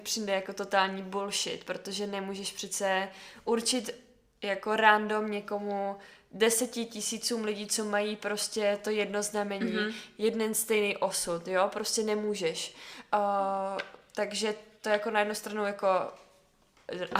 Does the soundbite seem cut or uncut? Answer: uncut